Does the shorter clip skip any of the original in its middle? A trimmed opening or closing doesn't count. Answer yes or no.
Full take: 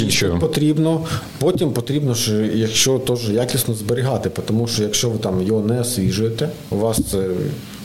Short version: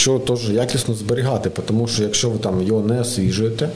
no